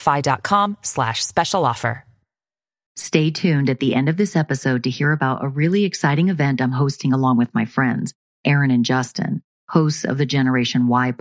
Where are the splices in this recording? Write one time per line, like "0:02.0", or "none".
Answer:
none